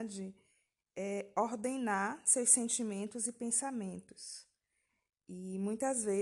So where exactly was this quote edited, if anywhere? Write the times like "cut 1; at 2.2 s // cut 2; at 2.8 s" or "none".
none